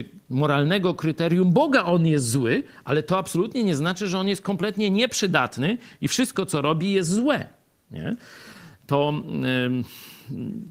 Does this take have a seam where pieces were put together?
no; 0 cuts

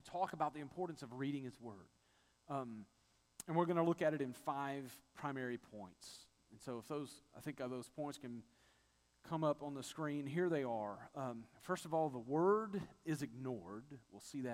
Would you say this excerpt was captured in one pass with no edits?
yes; 0 cuts

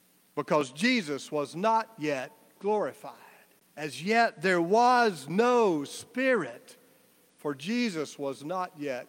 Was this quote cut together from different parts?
yes; 1 cut; at 3.6 s

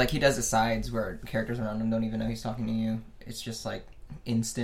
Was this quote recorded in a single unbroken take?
yes; 0 cuts

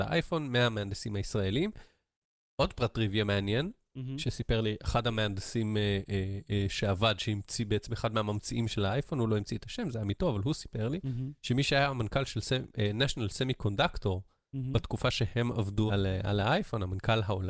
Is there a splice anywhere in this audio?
yes; 1 cut; at 15.9 s

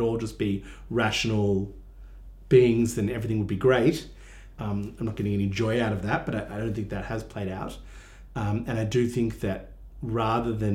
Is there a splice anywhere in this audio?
yes; 1 cut; at 4.5 s

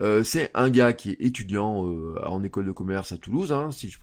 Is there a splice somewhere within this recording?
no; 0 cuts

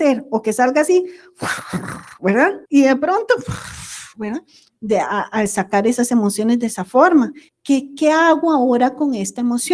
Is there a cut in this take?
yes; 3 cuts; at 2.6 s, 4.7 s, 7.5 s

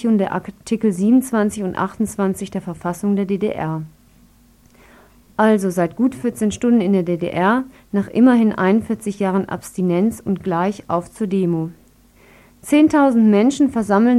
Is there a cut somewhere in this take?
no; 0 cuts

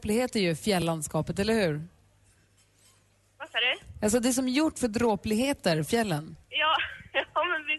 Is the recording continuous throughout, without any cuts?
yes; 0 cuts

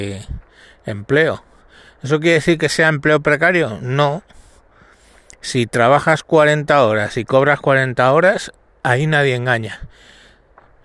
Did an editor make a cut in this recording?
no; 0 cuts

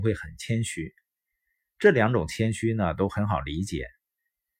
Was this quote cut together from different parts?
no; 0 cuts

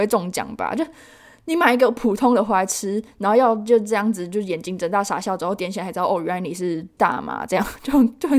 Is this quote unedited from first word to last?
yes; 0 cuts

